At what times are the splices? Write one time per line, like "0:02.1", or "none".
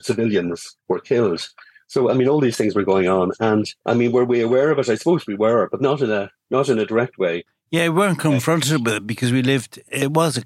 none